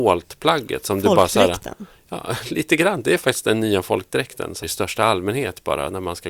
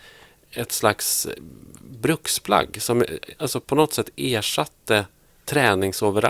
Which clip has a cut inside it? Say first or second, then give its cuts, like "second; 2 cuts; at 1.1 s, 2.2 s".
first; 1 cut; at 4.6 s